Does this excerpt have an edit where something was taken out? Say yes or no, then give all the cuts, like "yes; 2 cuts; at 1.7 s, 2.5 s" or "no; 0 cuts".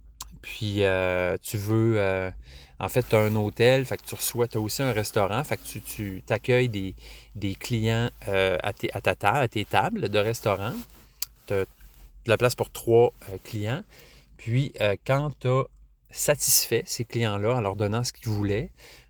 no; 0 cuts